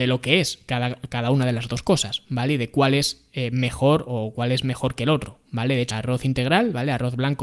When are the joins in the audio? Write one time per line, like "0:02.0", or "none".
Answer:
0:05.9